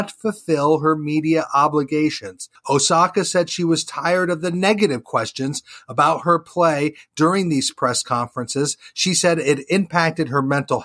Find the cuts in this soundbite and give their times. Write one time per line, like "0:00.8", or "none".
0:02.6